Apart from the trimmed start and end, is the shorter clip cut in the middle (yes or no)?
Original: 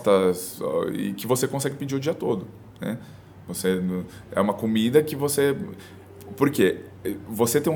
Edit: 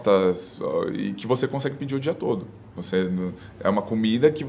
yes